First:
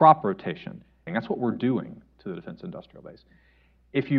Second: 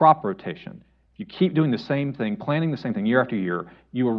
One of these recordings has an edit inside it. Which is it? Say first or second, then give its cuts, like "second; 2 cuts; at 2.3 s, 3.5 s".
first; 1 cut; at 1.1 s